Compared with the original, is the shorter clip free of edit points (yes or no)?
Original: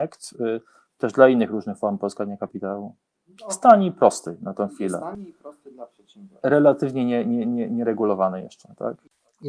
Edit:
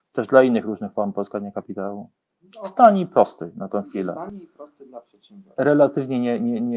yes